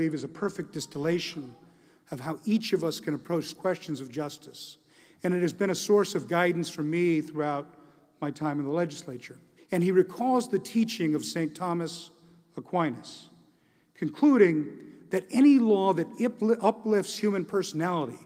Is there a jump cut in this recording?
yes; 1 cut; at 9.6 s

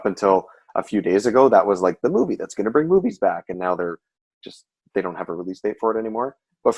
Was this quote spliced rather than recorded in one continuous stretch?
no; 0 cuts

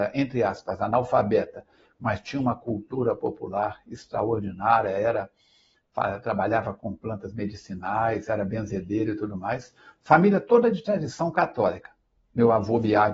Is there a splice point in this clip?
no; 0 cuts

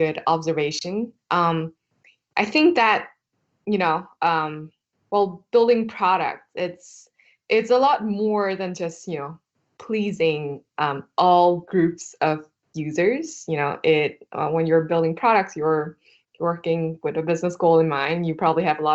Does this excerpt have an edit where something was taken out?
no; 0 cuts

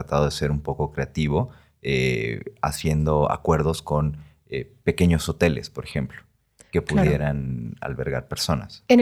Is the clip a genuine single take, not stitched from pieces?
yes; 0 cuts

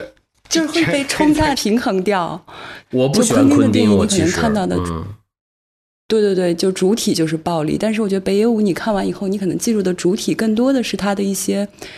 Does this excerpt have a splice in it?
yes; 2 cuts; at 1.5 s, 2.8 s

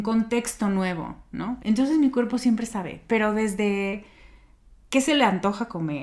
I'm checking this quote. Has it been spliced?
yes; 1 cut; at 1.6 s

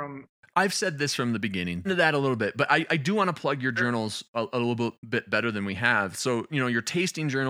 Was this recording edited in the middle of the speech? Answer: yes; 2 cuts; at 1.8 s, 6.5 s

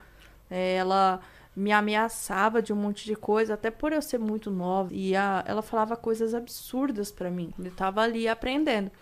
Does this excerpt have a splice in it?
yes; 2 cuts; at 4.9 s, 7.5 s

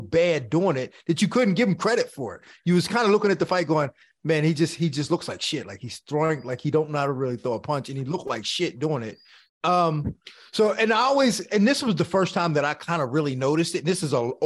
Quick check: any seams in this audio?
yes; 1 cut; at 9.5 s

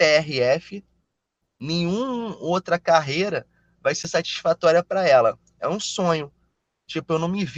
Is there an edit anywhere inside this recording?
no; 0 cuts

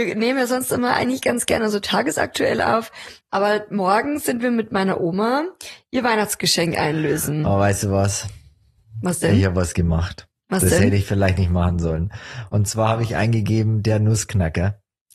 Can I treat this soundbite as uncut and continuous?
yes; 0 cuts

